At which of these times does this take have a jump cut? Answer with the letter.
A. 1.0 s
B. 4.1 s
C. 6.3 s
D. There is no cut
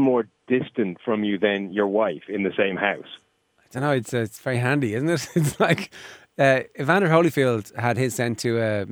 D